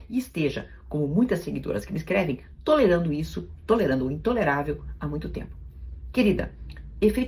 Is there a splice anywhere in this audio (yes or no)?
no